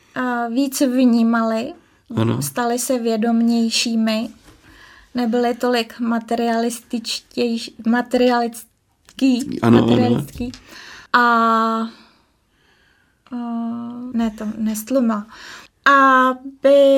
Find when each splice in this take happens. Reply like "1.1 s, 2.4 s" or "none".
11.1 s, 14.1 s, 15.7 s